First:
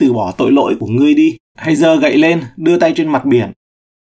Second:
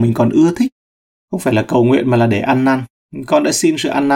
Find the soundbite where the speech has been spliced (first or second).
first